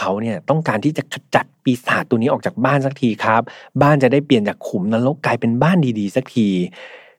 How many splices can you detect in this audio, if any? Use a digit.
0